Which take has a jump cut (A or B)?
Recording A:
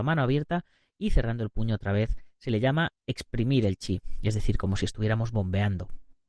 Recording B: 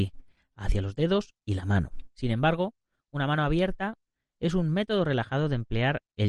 B